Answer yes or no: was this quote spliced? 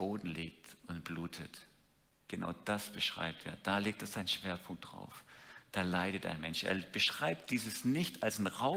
no